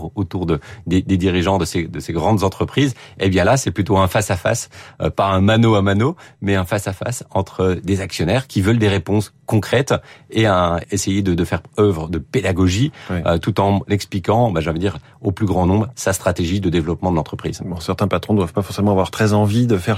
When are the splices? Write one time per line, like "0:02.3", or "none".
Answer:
0:10.8